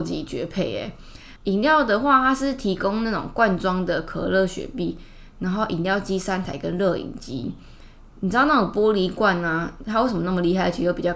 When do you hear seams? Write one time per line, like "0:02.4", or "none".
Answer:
0:01.4